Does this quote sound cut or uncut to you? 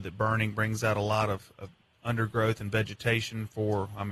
uncut